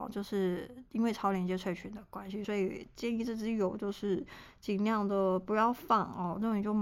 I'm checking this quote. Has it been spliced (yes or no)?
no